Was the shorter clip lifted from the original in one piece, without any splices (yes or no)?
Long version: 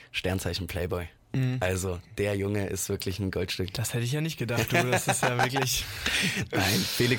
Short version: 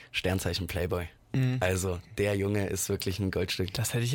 yes